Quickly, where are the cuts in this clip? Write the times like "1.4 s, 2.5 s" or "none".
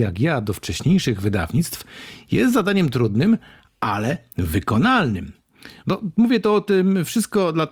5.8 s